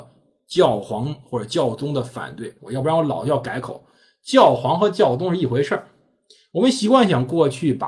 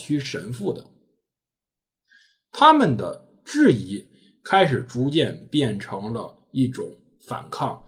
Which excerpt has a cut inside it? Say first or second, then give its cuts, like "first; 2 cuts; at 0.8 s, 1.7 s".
first; 1 cut; at 2.6 s